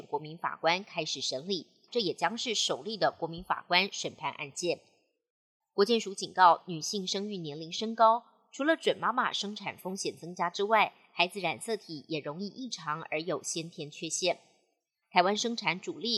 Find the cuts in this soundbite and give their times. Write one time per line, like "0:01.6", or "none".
0:01.9
0:05.6
0:15.0